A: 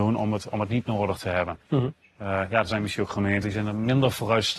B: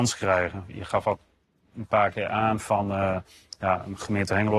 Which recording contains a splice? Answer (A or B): A